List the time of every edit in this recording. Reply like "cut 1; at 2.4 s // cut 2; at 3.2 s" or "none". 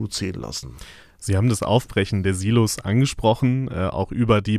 none